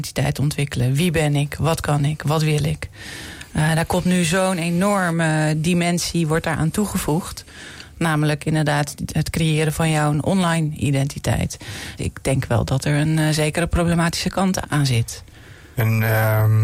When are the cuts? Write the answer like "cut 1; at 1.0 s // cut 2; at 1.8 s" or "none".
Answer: cut 1; at 12.0 s // cut 2; at 14.6 s